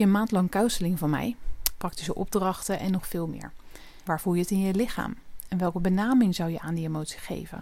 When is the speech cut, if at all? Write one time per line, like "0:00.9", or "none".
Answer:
0:01.8
0:04.1